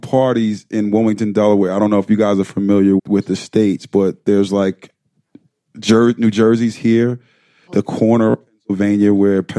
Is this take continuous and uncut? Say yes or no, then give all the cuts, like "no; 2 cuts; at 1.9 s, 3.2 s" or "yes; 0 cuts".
no; 2 cuts; at 3.0 s, 7.7 s